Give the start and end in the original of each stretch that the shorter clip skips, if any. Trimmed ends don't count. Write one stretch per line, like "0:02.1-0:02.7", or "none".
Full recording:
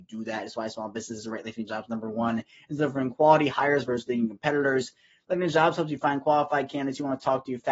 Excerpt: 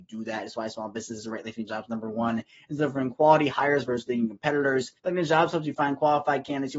0:05.0-0:05.2